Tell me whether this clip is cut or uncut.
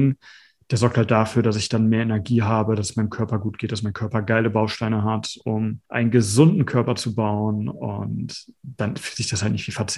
cut